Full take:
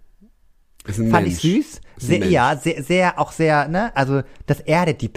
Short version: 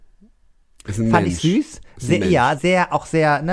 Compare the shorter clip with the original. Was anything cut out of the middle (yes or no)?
yes